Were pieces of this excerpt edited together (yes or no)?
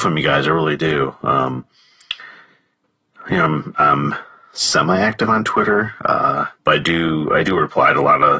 yes